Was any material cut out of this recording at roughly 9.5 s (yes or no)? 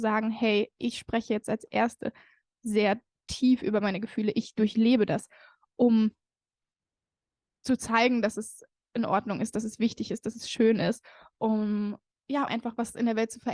no